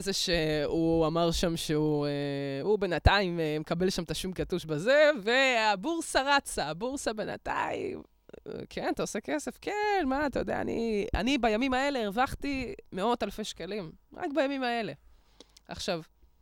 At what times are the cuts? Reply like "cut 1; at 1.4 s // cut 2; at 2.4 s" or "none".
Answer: none